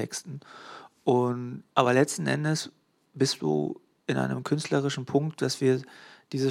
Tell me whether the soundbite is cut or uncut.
cut